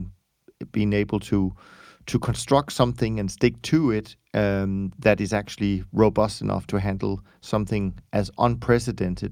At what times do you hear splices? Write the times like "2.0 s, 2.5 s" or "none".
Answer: none

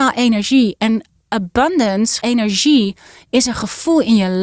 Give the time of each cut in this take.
2.2 s

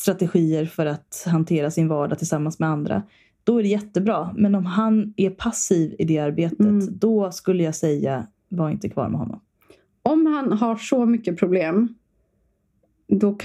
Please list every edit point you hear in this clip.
none

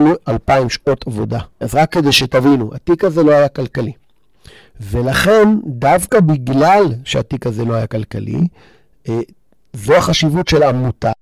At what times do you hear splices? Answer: 1.6 s

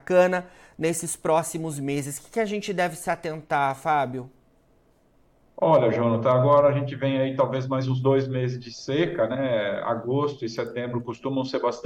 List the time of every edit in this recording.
none

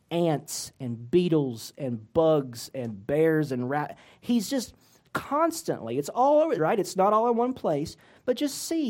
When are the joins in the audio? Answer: 6.6 s

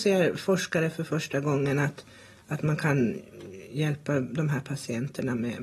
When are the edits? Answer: none

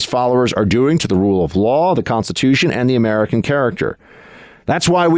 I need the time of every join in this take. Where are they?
none

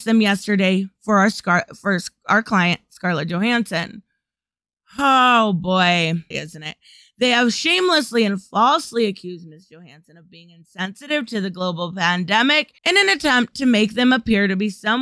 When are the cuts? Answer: 6.3 s, 12.8 s

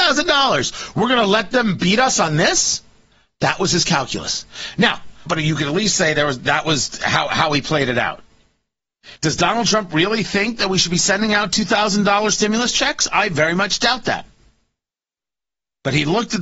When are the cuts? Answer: 5.3 s, 9.2 s

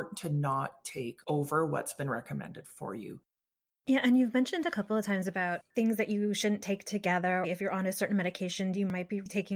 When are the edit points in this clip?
3.7 s, 7.4 s

